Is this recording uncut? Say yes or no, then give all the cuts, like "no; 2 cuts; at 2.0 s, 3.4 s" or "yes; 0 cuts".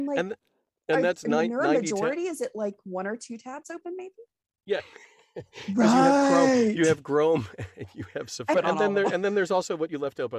no; 2 cuts; at 4.8 s, 8.5 s